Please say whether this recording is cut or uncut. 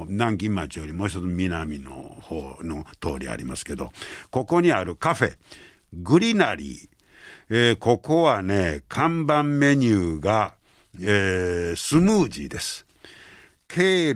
uncut